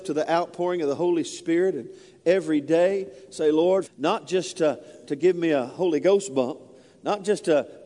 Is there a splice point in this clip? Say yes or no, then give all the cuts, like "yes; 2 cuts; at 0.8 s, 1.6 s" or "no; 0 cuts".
yes; 1 cut; at 3.8 s